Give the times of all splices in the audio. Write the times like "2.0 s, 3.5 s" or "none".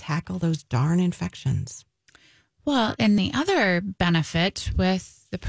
3.2 s